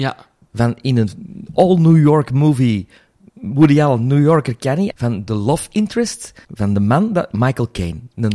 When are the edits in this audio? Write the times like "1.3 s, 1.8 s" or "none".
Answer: 4.9 s, 6.4 s